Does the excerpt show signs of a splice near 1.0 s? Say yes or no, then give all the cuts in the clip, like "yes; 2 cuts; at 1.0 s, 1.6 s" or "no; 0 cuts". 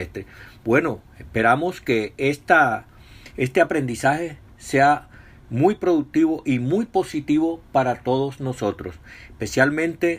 no; 0 cuts